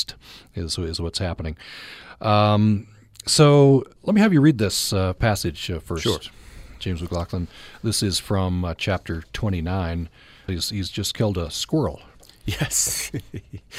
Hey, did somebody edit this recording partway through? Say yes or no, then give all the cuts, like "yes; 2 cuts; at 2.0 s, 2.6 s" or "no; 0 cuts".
yes; 2 cuts; at 4.0 s, 10.5 s